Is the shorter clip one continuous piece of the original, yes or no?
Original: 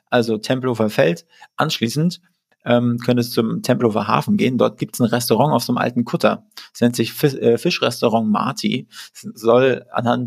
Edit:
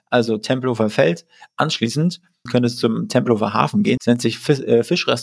no